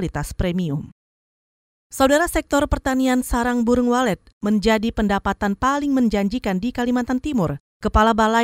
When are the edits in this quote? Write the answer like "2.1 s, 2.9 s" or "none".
none